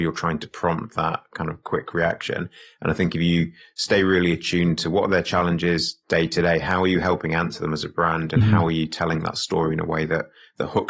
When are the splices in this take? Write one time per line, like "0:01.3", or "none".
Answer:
none